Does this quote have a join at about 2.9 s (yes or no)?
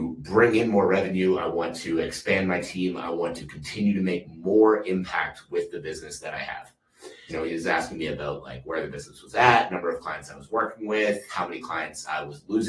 no